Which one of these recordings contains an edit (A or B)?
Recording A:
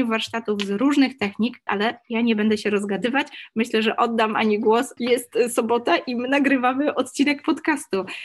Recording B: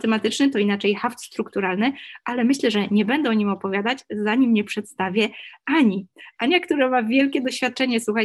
A